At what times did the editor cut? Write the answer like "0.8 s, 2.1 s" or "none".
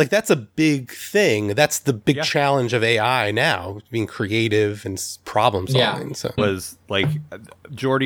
6.4 s